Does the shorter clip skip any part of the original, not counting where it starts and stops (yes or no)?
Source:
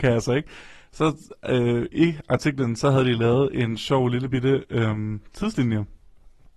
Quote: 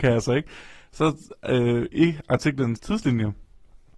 yes